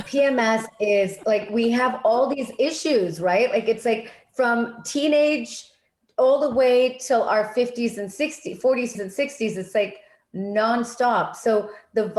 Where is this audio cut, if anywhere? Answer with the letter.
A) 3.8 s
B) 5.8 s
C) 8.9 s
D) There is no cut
C